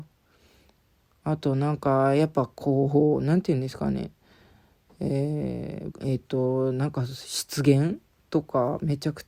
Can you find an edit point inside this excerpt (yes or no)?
yes